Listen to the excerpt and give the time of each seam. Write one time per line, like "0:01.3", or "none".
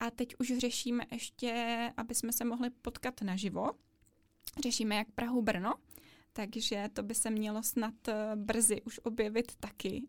0:01.9